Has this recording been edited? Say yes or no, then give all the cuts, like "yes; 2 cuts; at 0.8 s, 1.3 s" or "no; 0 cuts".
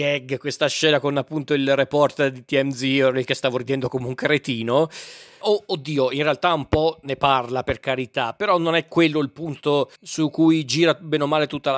yes; 2 cuts; at 5.4 s, 10.0 s